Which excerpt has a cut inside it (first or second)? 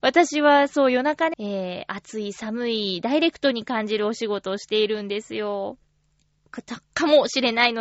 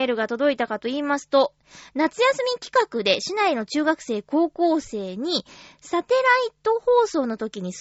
first